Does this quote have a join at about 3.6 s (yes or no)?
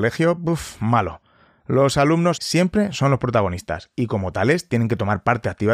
no